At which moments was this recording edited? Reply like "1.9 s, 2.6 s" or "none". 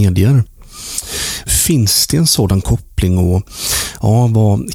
1.5 s